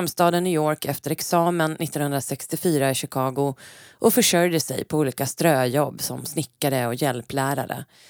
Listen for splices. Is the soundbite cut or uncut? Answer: uncut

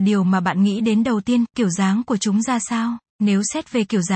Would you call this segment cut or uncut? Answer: cut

